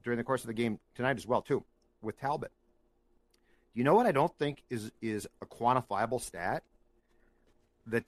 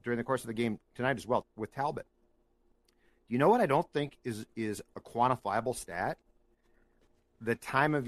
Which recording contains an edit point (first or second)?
second